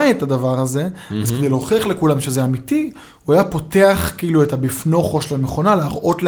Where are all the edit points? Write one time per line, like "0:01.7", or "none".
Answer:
none